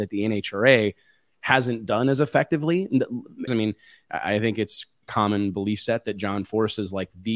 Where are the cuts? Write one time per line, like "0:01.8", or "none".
0:03.5
0:05.0